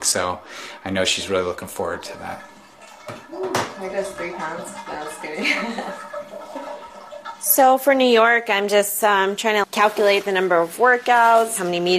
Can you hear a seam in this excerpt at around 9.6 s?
yes; 1 cut; at 9.6 s

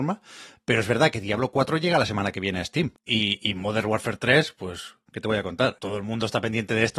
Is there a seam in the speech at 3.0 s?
yes; 2 cuts; at 3.0 s, 5.8 s

